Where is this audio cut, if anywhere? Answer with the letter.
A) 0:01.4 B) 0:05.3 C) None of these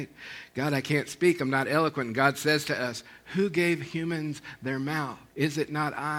B